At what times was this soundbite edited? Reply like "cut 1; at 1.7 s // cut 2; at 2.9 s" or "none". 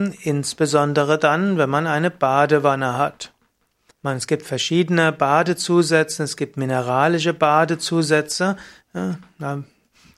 cut 1; at 3.9 s // cut 2; at 8.8 s